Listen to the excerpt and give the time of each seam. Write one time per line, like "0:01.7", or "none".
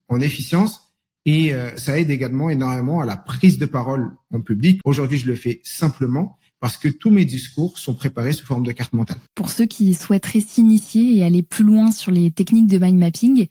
0:04.8
0:09.3